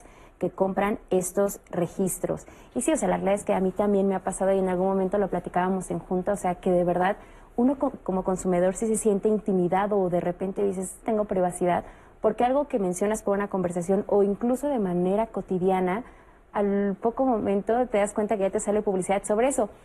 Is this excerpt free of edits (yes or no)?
no